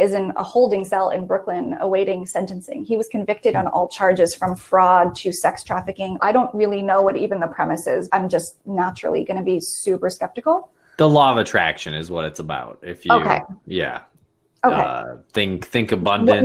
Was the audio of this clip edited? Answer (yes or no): yes